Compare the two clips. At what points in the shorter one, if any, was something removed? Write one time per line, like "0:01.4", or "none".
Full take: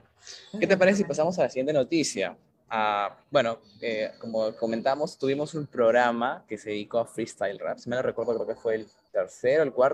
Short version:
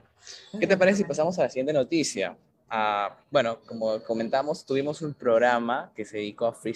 0:03.6